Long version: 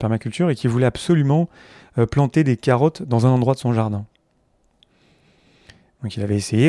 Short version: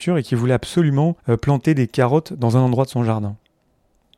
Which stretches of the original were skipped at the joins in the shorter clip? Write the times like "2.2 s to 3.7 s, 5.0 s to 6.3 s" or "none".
1.5 s to 1.9 s